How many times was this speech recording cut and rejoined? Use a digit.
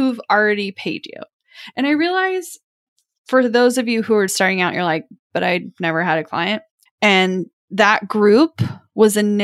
2